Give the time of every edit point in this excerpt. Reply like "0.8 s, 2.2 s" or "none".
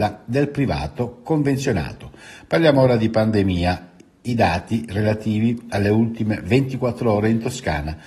none